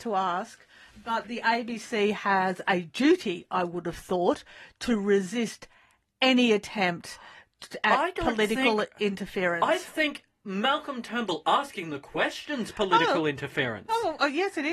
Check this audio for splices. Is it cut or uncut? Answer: uncut